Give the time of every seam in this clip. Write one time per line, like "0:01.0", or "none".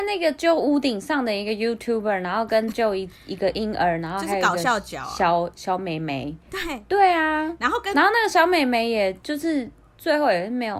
none

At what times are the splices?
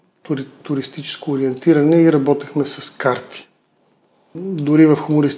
0:04.4

